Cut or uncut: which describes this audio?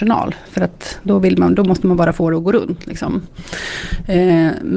uncut